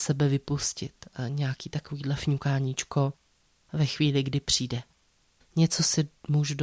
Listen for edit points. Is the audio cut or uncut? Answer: cut